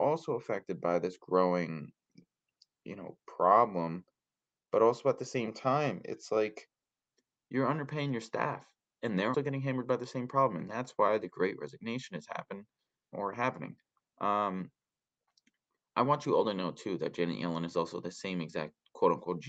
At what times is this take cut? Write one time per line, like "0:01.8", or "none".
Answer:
0:09.3
0:13.1